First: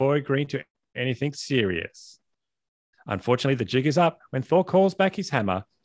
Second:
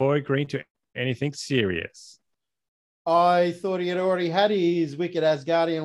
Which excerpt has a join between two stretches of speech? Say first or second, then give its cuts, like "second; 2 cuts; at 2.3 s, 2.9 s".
first; 1 cut; at 2.9 s